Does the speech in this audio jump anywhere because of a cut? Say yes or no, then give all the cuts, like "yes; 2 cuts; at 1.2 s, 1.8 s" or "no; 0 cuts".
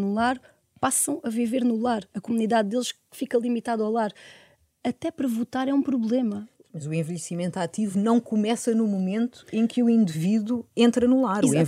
no; 0 cuts